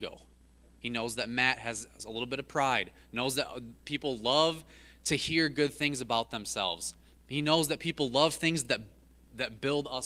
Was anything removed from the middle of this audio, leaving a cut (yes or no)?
no